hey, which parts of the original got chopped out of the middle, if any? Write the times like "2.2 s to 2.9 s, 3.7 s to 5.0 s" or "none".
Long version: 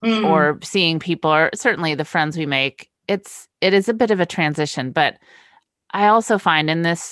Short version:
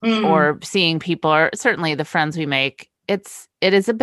none